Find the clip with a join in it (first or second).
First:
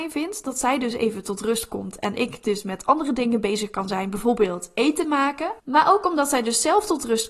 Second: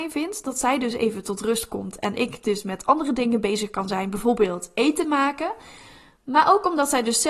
first